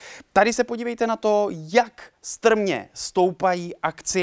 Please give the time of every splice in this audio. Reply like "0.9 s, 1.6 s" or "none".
2.2 s